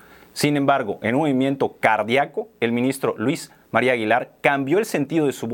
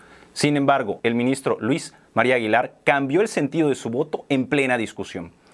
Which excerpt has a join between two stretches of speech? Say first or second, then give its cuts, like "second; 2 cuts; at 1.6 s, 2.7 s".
second; 1 cut; at 1.0 s